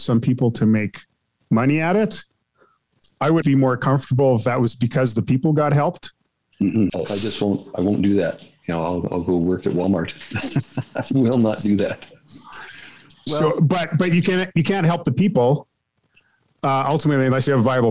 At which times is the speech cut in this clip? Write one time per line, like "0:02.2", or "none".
0:03.4
0:06.9